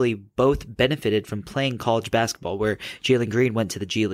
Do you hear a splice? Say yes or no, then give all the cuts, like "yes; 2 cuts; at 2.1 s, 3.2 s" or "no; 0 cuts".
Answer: no; 0 cuts